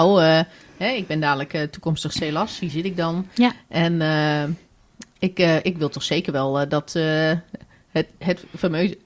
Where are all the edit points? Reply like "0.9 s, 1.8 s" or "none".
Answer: none